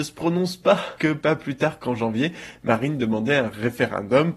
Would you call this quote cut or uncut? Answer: cut